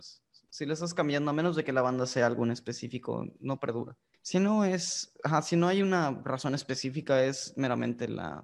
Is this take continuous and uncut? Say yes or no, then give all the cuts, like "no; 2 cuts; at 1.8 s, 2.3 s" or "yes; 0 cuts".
no; 1 cut; at 4.1 s